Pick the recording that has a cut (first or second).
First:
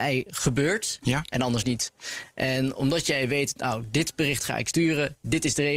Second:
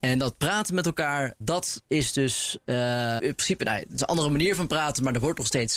second